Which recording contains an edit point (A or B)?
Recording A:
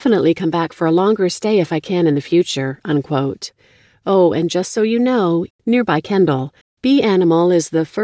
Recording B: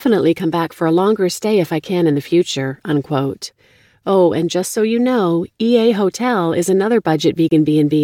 A